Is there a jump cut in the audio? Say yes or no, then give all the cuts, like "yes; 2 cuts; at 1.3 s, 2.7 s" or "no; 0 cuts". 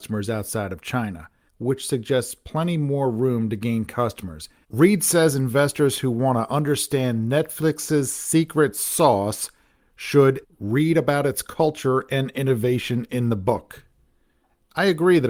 yes; 3 cuts; at 1.5 s, 4.6 s, 10.4 s